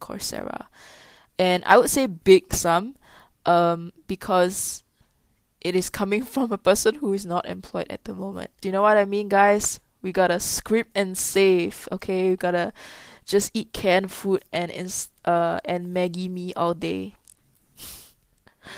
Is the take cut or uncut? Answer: cut